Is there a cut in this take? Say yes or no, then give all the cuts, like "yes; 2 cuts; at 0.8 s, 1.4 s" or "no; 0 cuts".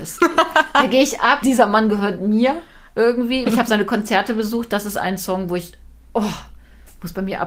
yes; 2 cuts; at 1.4 s, 3.4 s